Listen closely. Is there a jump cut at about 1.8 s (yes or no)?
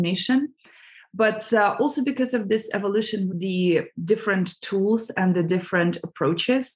no